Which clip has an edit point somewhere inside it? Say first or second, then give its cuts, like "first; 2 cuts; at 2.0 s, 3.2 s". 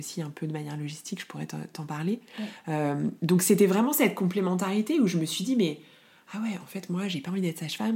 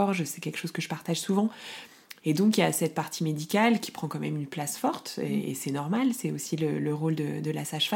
second; 1 cut; at 2.2 s